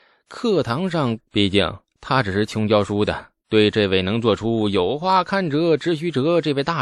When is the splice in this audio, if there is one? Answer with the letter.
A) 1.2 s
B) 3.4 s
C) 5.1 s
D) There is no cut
A